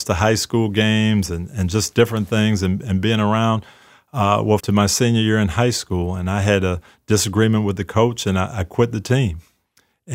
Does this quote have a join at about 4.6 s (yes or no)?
yes